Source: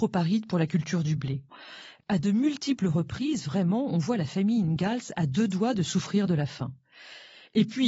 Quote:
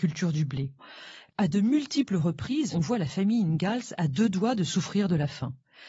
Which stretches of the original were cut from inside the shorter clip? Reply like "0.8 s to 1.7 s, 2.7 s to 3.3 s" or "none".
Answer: 3.4 s to 3.9 s